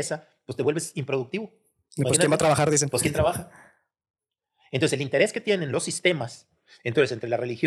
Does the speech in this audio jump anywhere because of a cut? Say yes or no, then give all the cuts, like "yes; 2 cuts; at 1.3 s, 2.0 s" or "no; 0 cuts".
no; 0 cuts